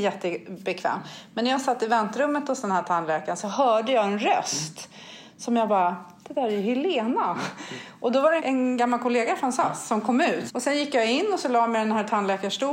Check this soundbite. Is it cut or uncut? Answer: cut